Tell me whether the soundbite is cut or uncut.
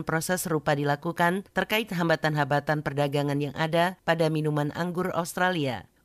uncut